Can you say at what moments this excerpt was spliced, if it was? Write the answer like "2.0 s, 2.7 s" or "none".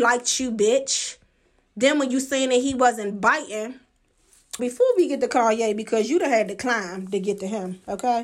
4.6 s